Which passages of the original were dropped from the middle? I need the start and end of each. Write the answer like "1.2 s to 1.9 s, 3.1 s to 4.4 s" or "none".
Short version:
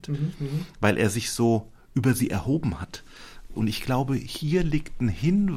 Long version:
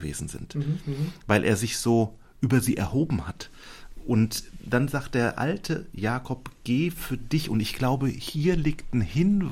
4.0 s to 7.5 s